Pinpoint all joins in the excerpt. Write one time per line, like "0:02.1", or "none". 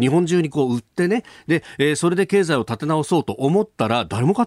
none